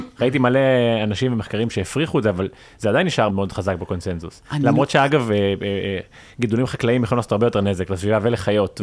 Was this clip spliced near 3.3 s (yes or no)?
yes